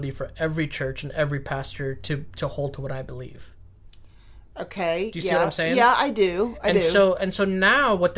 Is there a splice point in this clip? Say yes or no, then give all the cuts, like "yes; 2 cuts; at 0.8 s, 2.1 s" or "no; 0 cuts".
no; 0 cuts